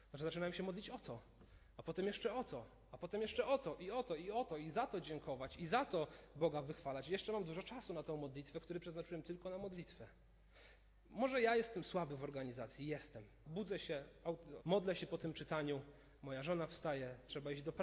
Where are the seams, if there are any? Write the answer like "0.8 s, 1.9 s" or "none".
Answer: 13.4 s, 14.6 s, 16.2 s